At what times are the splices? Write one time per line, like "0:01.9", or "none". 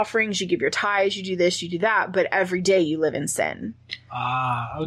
none